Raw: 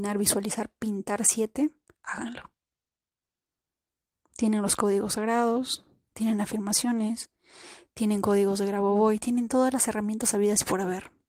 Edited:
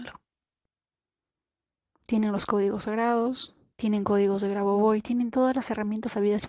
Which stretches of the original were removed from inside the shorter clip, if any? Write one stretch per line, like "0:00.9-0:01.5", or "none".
0:06.0-0:07.9